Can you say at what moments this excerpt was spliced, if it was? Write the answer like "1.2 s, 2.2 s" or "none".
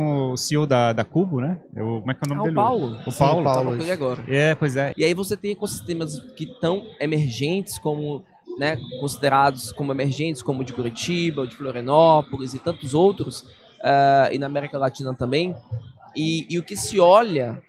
4.9 s